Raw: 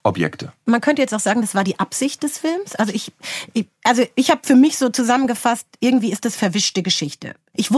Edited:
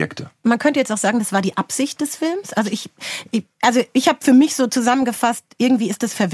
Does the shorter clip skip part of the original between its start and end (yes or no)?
no